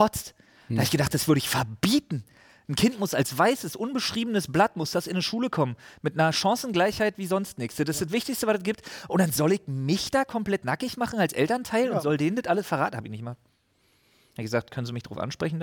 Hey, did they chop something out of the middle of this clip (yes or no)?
no